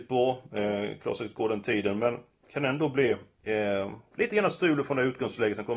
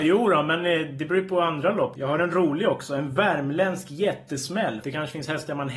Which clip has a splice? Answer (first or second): second